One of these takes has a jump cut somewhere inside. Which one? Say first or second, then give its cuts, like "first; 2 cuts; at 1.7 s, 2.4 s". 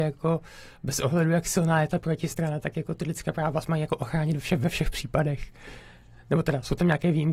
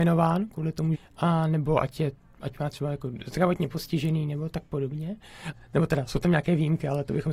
second; 2 cuts; at 0.9 s, 5.5 s